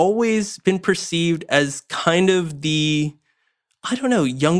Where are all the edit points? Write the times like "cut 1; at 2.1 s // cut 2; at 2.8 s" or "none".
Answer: none